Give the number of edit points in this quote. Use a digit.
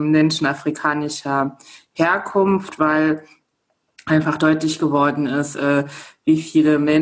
0